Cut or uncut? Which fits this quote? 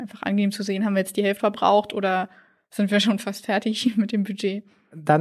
cut